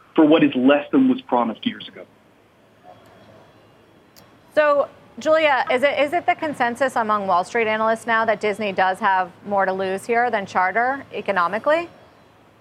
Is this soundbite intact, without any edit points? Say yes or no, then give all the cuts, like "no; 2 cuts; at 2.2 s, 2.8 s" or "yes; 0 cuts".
yes; 0 cuts